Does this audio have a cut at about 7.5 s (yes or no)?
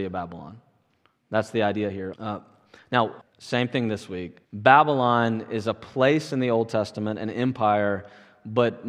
no